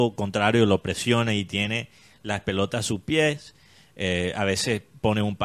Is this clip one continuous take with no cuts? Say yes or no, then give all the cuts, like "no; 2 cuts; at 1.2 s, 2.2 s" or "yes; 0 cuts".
yes; 0 cuts